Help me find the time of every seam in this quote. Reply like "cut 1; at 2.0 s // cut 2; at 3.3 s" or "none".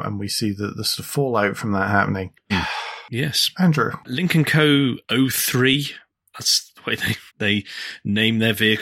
cut 1; at 2.5 s // cut 2; at 7.3 s